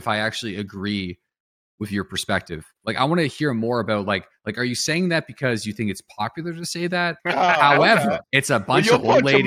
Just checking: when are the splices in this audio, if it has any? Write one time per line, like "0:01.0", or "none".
0:07.2
0:08.2